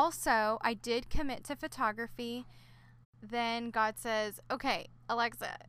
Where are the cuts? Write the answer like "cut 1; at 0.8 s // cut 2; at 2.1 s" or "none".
cut 1; at 3.0 s